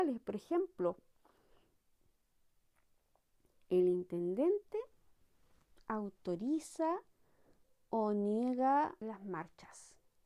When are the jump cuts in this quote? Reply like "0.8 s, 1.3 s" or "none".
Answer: 9.0 s